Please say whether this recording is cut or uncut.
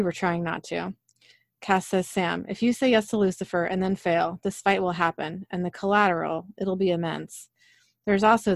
uncut